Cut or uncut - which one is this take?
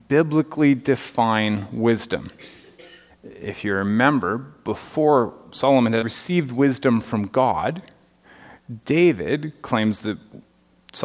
cut